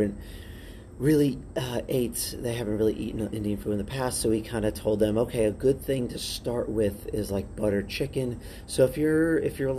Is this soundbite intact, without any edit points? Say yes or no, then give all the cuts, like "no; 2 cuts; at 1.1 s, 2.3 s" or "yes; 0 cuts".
yes; 0 cuts